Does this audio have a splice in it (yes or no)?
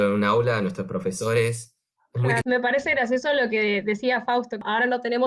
yes